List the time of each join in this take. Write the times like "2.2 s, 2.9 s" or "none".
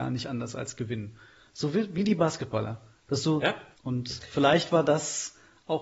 3.7 s

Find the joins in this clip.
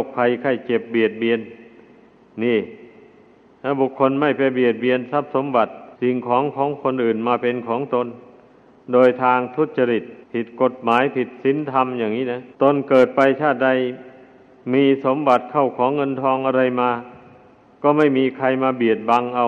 5.9 s, 10.2 s, 12.5 s

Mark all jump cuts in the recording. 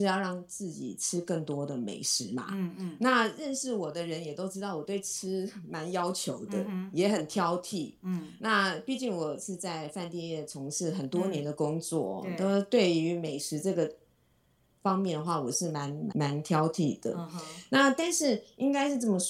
16.1 s

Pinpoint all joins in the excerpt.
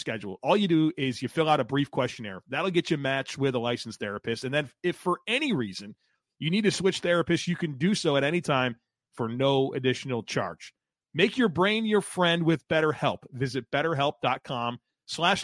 none

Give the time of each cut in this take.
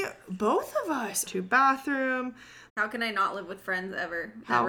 1.3 s, 2.7 s

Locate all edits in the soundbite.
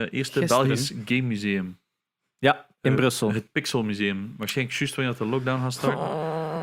none

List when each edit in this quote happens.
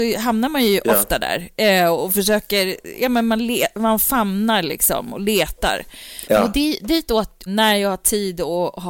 6.2 s, 7.5 s

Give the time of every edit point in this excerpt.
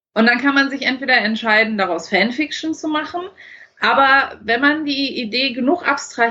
none

